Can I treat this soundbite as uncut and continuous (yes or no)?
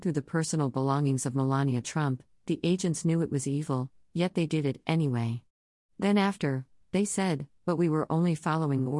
no